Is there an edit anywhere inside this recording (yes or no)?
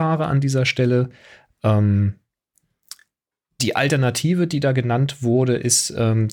no